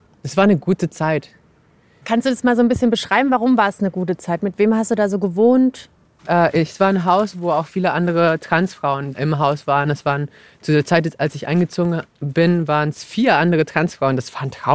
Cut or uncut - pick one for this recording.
uncut